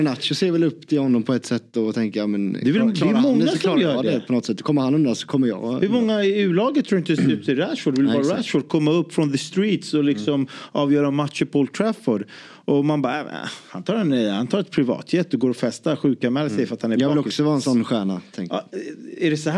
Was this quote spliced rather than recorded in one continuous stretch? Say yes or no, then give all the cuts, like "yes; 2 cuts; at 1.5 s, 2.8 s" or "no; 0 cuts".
no; 0 cuts